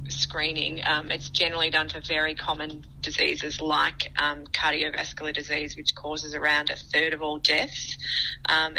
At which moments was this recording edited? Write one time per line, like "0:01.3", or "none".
none